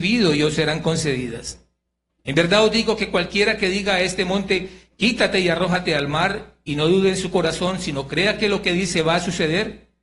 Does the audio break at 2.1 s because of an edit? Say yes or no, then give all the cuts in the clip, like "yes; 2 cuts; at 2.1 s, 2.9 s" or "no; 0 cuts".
yes; 1 cut; at 2.1 s